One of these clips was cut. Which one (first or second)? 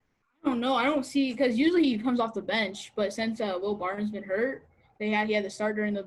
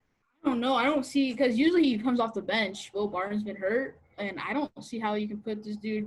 second